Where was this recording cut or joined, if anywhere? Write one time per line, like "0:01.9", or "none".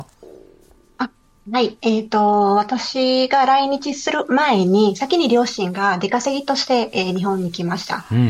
none

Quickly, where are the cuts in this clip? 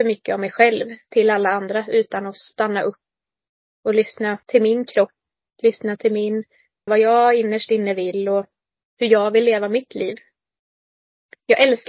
0:04.4
0:06.9

